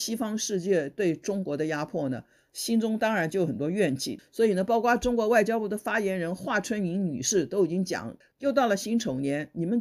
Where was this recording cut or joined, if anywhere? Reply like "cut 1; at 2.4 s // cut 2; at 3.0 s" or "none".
cut 1; at 4.2 s // cut 2; at 8.2 s